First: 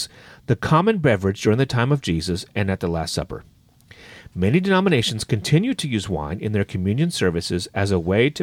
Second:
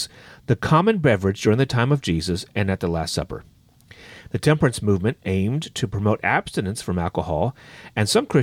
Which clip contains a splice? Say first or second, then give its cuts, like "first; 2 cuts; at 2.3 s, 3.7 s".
second; 1 cut; at 4.3 s